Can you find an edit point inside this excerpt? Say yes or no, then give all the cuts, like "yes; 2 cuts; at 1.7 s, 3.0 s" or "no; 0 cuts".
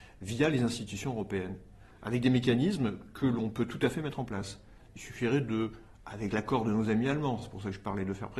no; 0 cuts